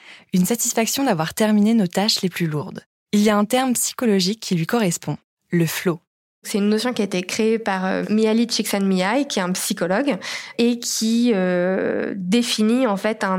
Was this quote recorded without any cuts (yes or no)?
yes